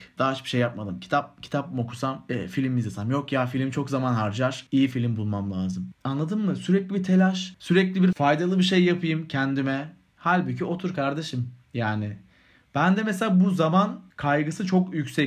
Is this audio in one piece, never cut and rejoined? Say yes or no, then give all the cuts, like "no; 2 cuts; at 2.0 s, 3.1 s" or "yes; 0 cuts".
no; 1 cut; at 8.1 s